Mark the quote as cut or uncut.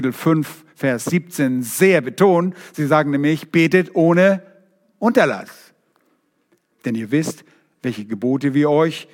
cut